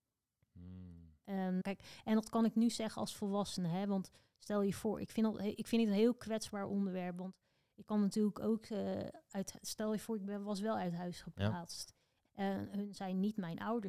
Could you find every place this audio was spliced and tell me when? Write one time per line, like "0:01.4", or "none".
0:01.6
0:12.3